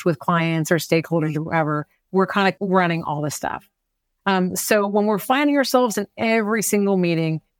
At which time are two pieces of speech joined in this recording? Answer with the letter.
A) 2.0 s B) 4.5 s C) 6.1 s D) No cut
D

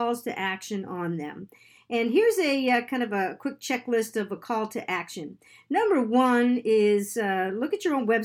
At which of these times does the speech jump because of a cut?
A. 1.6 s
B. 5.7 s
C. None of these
C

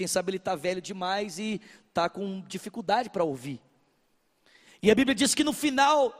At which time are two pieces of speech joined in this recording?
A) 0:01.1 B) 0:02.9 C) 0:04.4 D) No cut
D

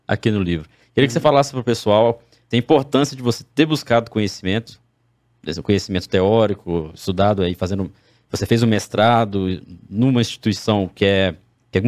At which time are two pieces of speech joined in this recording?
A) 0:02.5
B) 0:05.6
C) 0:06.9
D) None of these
A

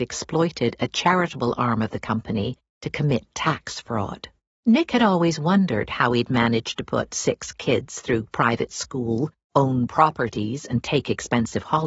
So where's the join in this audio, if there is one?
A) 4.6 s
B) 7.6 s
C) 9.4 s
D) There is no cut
A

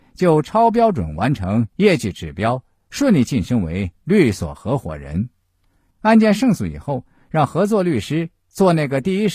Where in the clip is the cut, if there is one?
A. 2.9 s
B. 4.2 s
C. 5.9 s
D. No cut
C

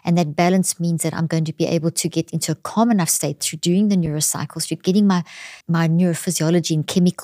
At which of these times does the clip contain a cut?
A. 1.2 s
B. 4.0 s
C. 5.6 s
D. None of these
C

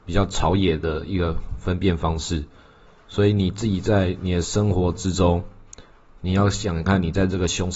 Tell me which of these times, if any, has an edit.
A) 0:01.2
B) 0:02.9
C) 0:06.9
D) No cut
C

